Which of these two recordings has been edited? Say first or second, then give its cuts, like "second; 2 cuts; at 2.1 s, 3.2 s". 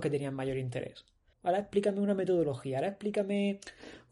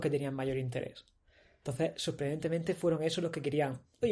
first; 1 cut; at 1.3 s